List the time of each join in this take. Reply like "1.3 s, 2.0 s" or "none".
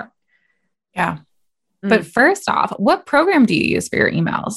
1.8 s